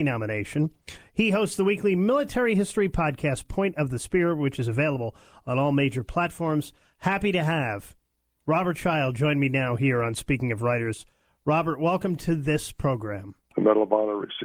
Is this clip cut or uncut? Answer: cut